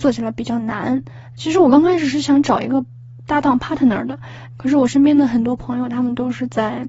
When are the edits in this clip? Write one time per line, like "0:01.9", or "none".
0:01.4
0:04.6